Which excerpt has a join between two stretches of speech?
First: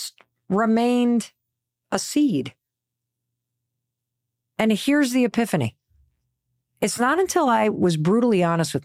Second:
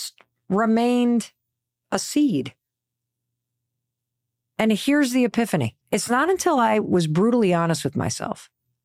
second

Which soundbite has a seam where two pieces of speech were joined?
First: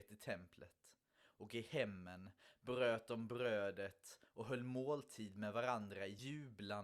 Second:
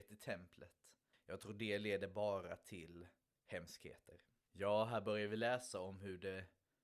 second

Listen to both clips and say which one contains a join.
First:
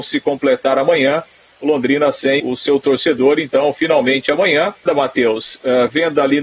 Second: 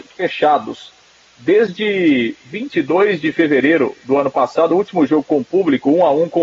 first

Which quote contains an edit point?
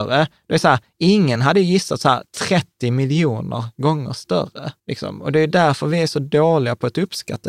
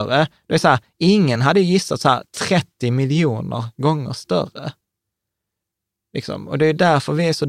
first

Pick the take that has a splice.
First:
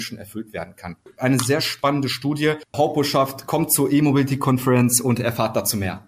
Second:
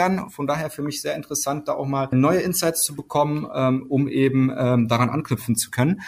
first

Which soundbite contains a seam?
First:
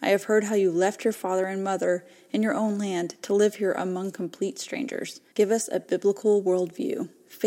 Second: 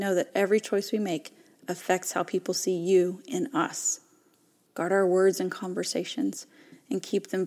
first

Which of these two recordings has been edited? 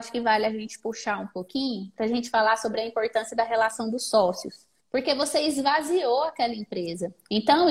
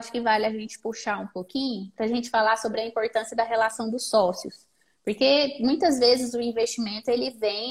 first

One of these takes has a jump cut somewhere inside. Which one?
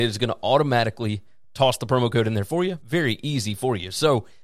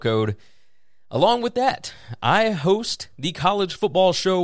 first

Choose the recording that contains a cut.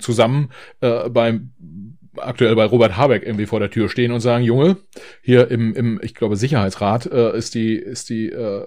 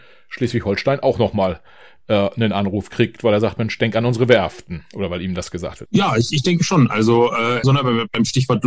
second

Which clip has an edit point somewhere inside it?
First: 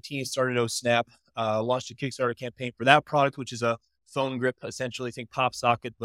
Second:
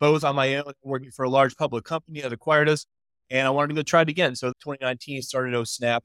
second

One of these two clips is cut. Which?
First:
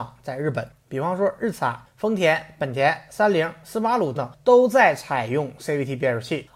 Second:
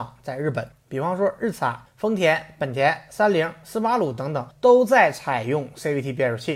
first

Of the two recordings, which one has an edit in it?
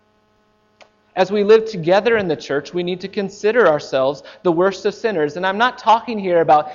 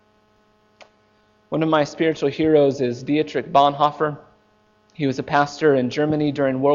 first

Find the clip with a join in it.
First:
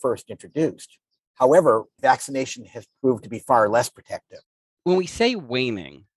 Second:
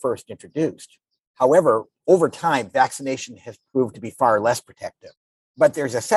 first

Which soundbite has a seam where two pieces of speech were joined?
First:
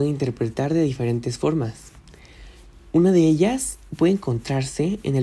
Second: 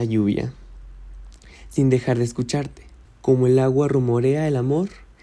second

